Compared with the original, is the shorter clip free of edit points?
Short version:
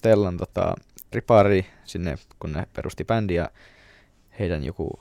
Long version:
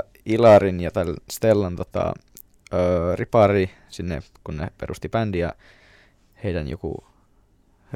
no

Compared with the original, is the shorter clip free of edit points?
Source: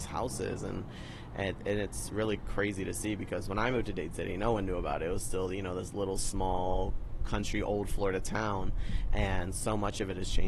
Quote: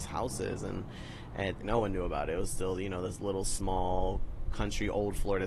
no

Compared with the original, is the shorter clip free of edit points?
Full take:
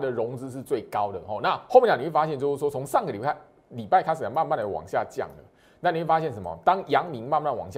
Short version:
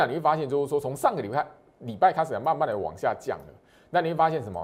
yes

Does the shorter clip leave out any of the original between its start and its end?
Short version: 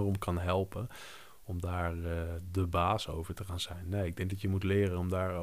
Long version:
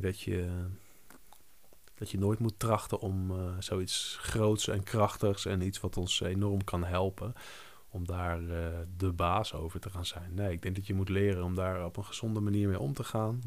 no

